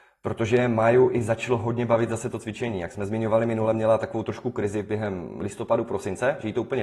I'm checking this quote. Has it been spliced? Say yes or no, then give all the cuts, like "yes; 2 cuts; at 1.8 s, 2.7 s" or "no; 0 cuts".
no; 0 cuts